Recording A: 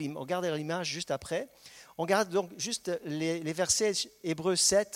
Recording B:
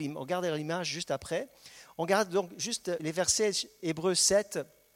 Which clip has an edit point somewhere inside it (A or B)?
B